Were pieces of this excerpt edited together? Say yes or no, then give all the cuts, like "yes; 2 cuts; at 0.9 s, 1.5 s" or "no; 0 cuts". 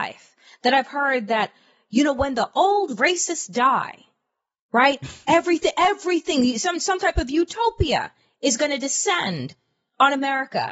no; 0 cuts